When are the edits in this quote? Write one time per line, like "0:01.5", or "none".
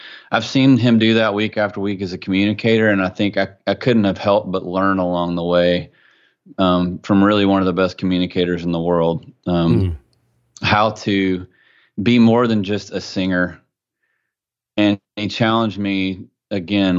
none

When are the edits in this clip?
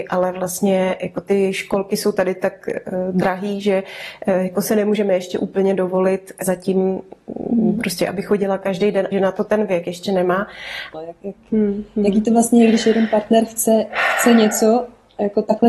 0:06.4
0:09.1
0:10.9

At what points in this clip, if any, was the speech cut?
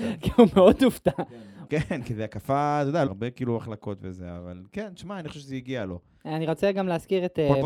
0:01.7
0:03.1

